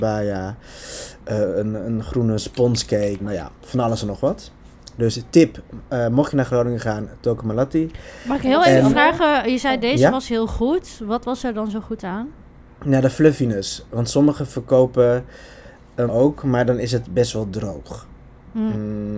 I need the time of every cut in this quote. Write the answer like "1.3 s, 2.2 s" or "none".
3.2 s, 16.1 s